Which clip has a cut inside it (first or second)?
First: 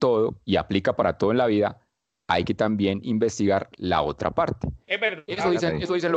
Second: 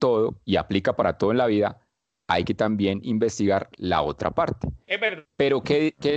second